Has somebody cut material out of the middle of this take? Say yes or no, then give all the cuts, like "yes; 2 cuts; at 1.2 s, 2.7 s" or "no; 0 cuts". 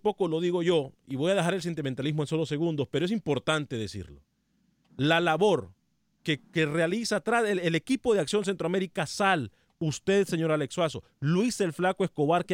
no; 0 cuts